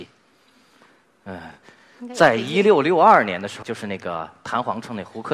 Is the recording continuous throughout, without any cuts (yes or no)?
no